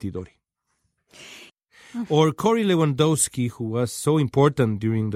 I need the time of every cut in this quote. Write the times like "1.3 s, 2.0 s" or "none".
1.5 s